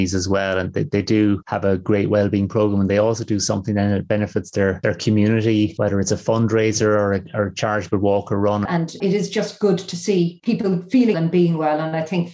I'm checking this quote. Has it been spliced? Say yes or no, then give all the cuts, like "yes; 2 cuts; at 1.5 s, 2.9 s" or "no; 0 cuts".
yes; 2 cuts; at 8.7 s, 11.1 s